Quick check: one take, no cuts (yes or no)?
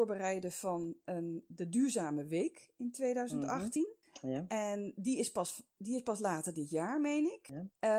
yes